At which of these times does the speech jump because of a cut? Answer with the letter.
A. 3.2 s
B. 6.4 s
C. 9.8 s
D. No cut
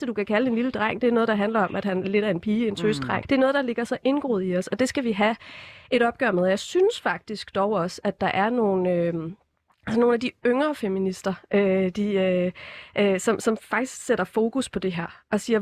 A